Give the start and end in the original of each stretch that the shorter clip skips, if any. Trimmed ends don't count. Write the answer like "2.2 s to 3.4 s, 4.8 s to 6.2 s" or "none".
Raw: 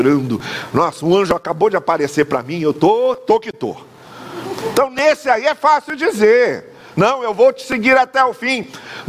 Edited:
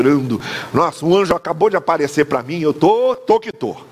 none